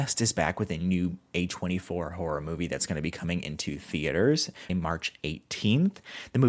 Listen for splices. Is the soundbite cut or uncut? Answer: cut